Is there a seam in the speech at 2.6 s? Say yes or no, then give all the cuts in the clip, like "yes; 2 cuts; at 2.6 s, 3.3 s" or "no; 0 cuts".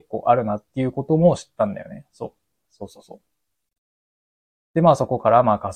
yes; 2 cuts; at 2.6 s, 4.6 s